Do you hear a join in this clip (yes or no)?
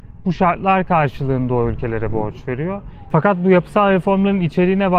yes